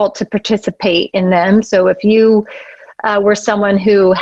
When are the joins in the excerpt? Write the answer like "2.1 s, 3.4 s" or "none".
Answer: none